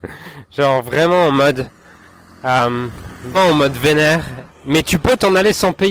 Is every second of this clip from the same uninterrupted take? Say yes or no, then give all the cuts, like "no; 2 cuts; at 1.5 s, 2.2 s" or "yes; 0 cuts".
no; 2 cuts; at 3.3 s, 4.5 s